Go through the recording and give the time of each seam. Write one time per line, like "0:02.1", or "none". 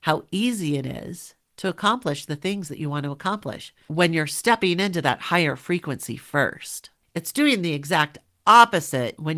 none